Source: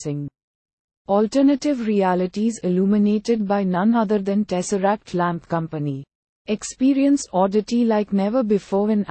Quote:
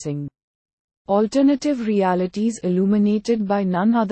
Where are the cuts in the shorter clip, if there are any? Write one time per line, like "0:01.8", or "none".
none